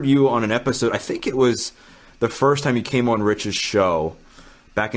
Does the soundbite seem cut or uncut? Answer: uncut